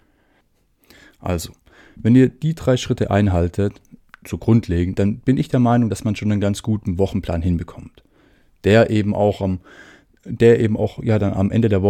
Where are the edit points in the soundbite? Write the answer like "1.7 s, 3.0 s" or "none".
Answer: none